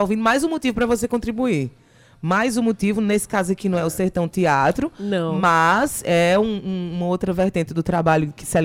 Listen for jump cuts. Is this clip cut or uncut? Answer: uncut